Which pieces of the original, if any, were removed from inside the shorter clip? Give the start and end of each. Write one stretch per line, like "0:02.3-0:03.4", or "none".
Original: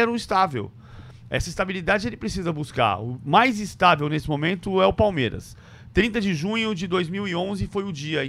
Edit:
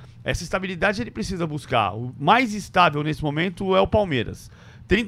none